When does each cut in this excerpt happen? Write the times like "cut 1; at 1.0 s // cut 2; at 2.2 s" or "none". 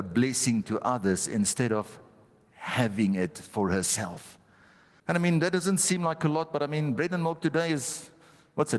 cut 1; at 5.0 s